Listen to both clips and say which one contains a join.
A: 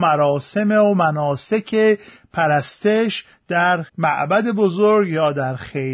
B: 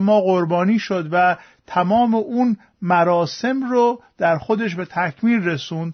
A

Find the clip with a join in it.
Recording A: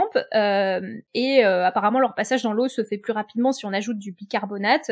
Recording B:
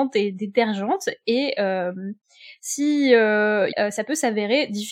B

